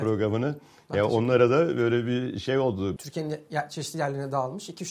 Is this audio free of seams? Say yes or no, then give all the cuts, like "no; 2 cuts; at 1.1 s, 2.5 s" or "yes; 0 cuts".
no; 1 cut; at 3.0 s